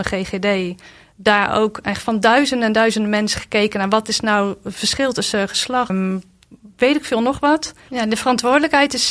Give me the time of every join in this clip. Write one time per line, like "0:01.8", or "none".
0:05.9
0:07.9